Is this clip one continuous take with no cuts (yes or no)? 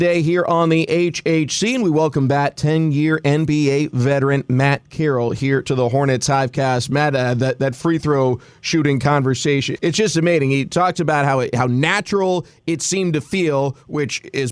yes